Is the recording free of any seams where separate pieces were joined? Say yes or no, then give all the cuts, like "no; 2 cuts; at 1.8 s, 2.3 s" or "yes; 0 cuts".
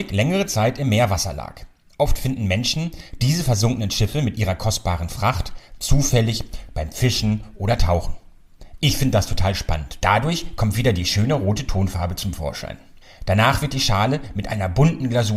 no; 1 cut; at 10.0 s